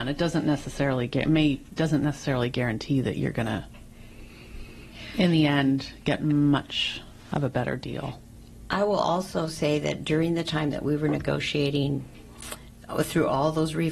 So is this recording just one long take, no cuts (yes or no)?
yes